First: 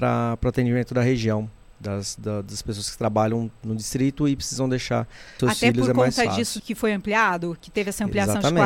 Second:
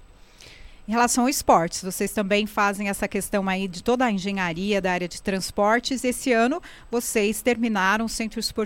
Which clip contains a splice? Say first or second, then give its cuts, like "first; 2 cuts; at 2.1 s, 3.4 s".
first; 2 cuts; at 5.4 s, 6.6 s